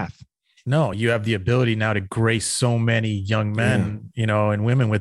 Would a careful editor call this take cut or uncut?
uncut